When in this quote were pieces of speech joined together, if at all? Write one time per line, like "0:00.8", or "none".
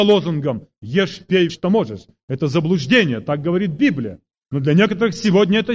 0:01.5